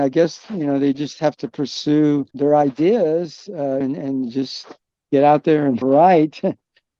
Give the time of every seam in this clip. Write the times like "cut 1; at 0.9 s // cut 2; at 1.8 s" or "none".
cut 1; at 2.3 s // cut 2; at 3.8 s // cut 3; at 5.8 s